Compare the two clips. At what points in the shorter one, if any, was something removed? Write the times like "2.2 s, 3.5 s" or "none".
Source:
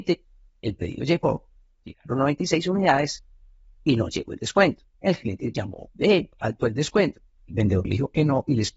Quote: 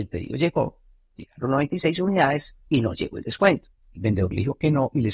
2.6 s, 3.8 s